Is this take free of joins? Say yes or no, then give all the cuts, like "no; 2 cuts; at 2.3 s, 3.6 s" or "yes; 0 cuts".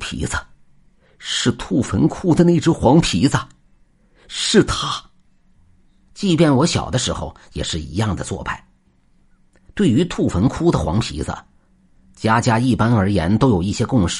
no; 2 cuts; at 6.1 s, 8.9 s